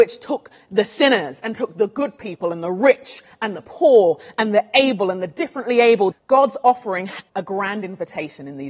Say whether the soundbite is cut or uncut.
cut